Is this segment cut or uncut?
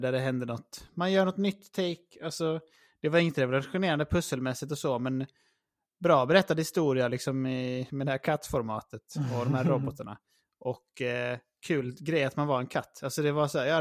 uncut